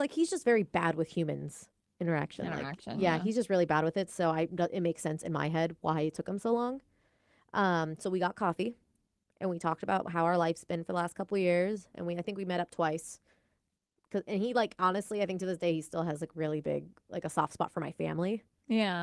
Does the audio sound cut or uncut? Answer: uncut